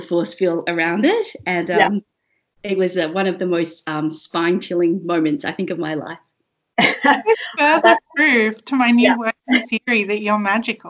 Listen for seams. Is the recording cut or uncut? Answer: uncut